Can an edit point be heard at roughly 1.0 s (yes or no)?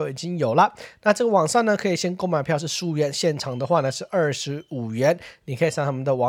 no